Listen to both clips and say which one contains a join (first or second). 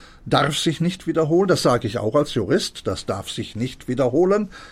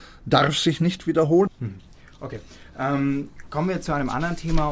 second